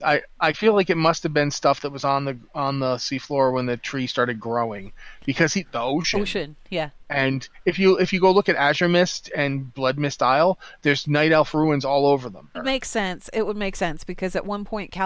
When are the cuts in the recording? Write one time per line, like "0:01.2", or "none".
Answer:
0:05.6
0:12.5